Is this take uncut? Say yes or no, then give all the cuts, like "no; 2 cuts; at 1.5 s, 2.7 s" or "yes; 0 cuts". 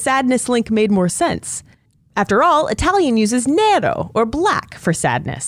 yes; 0 cuts